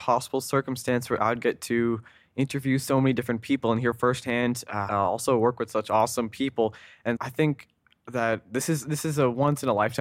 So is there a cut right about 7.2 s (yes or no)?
yes